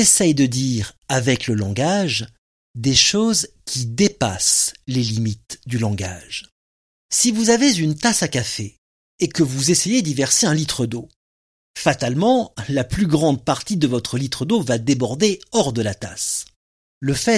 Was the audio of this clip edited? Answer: no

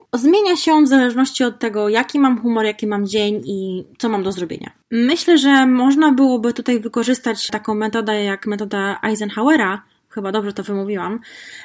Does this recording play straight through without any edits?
yes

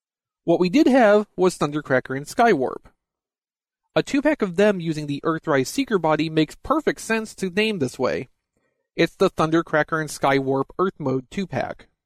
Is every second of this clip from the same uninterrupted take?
yes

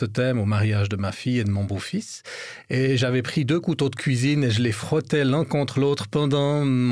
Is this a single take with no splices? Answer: yes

